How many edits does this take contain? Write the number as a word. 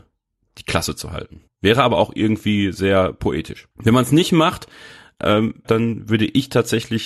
three